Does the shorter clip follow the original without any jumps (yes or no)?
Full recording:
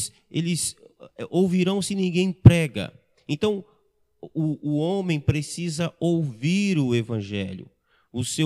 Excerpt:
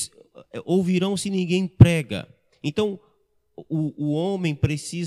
yes